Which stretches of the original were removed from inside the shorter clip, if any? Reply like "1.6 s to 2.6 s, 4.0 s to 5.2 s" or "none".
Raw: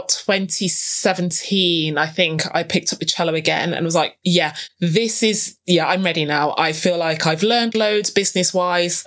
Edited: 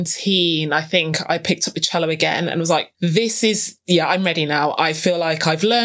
4.2 s to 4.7 s